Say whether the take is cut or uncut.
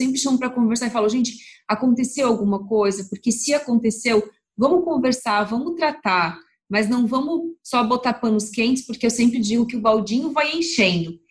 uncut